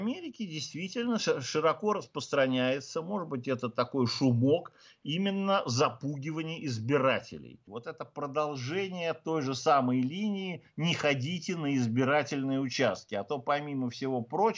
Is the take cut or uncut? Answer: cut